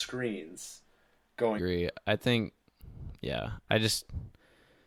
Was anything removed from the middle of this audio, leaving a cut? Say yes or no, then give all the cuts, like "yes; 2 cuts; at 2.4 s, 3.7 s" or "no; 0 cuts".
yes; 1 cut; at 1.6 s